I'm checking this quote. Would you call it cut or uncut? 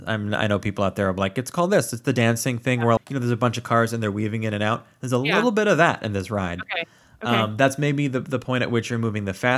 cut